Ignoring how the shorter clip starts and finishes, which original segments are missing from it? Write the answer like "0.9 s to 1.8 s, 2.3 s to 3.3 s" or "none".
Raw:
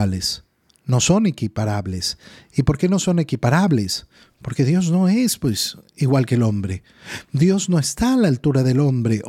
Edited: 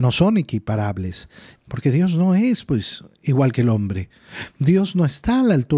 2.4 s to 4.3 s

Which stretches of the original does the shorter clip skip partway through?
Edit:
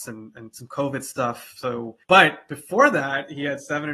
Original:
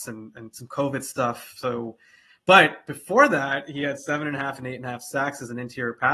2.0 s to 2.4 s

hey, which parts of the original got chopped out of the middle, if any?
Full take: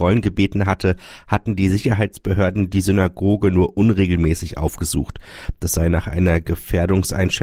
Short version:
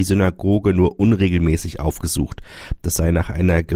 none

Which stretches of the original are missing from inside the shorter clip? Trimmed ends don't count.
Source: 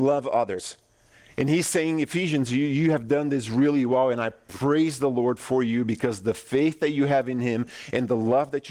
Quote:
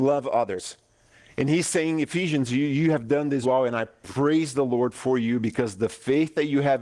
3.4 s to 3.9 s

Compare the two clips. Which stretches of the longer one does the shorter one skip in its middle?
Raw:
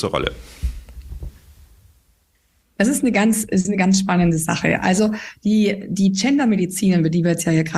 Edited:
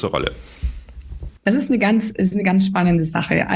1.4 s to 2.7 s

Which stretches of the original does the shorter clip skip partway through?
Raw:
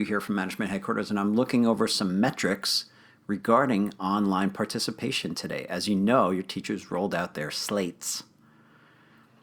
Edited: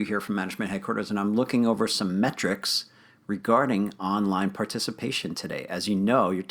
none

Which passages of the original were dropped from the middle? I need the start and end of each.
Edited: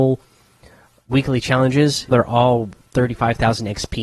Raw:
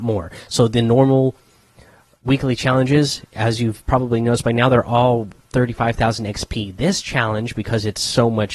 3.3 s to 4.7 s

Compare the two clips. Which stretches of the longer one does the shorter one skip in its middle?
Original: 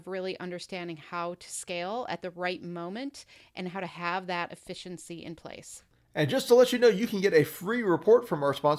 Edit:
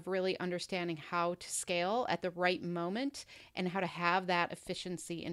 none

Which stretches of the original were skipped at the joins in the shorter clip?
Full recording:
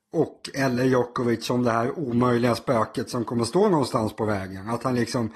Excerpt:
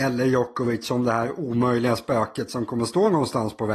none

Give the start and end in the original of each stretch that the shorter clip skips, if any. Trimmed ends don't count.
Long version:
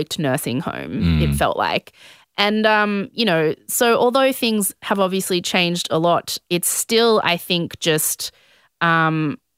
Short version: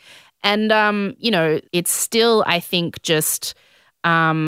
3.6 s to 6.4 s

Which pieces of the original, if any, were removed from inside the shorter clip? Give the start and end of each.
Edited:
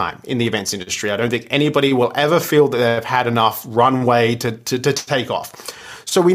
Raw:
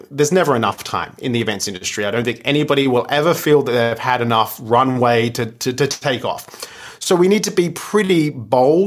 none

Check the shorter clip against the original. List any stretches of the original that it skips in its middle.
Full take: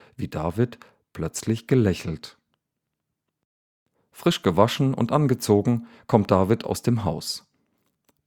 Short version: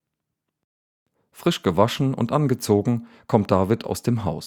none

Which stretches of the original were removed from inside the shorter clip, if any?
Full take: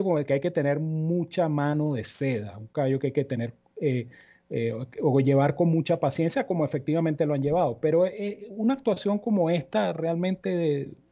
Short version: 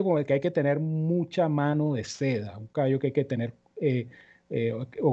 none

